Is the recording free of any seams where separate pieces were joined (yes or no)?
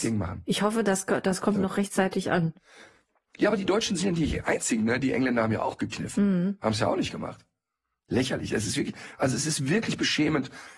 yes